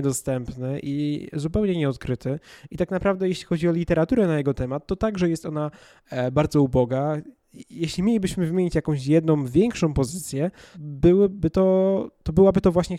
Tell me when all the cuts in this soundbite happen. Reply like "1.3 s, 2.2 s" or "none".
10.7 s

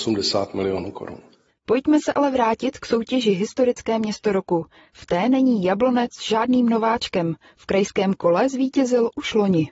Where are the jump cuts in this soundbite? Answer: none

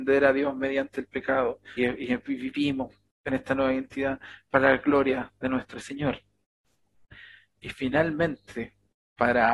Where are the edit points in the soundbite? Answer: 1.8 s

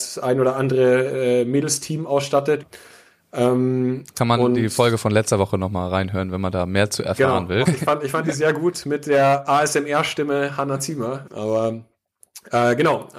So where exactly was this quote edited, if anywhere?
2.6 s, 7.7 s, 11.3 s

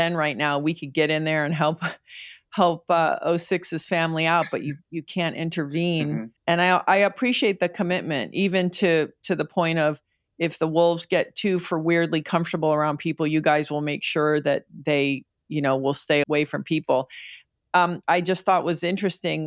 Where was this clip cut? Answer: 6.4 s, 16.2 s, 18.0 s

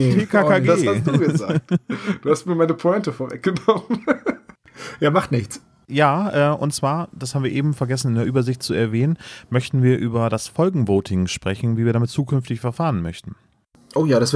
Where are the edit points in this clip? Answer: 5.9 s

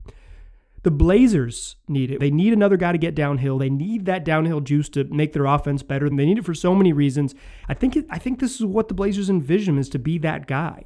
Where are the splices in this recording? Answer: 2.2 s, 6.1 s, 7.6 s

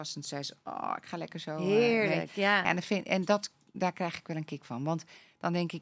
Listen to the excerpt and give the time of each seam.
none

